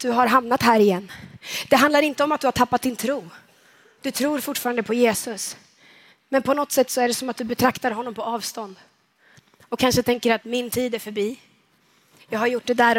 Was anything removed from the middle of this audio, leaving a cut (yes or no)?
no